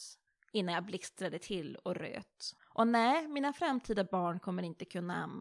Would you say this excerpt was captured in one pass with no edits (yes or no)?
no